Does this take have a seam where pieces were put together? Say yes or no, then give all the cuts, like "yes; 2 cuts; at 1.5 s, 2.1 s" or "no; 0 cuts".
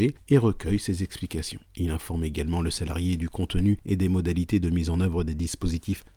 yes; 1 cut; at 1.7 s